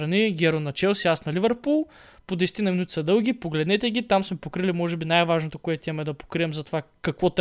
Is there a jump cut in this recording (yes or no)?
no